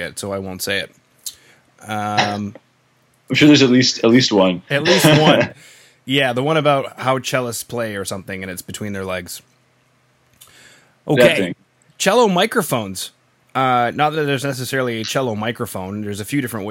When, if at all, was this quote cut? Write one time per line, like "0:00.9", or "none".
none